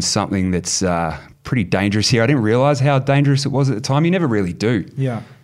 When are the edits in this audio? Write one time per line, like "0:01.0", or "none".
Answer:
none